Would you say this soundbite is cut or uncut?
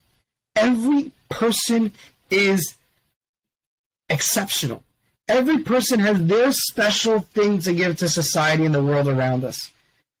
uncut